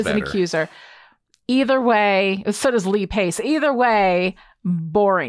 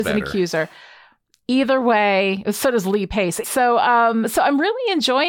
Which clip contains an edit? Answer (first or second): second